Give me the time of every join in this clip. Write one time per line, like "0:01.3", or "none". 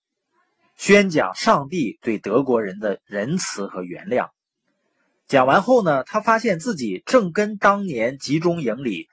none